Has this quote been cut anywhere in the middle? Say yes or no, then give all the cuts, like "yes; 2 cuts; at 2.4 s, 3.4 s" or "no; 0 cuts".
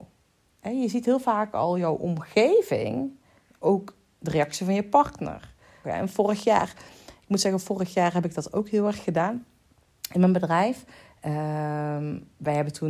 yes; 1 cut; at 5.8 s